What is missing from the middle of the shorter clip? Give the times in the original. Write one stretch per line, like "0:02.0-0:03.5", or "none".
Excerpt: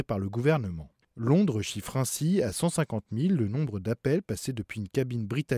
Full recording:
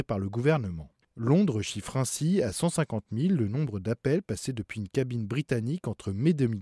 none